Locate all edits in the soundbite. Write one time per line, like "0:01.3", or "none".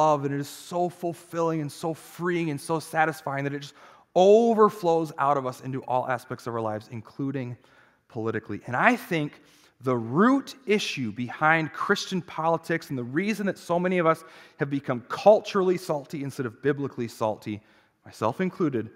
none